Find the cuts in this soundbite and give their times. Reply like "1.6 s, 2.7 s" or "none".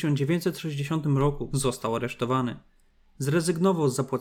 1.5 s